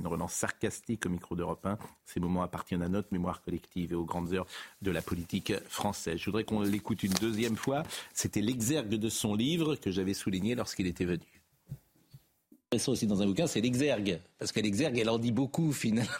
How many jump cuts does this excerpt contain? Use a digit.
0